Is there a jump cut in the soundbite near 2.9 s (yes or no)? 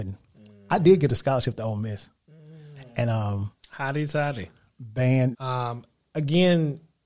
no